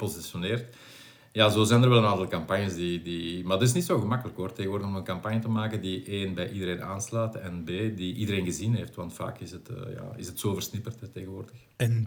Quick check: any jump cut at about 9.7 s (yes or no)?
no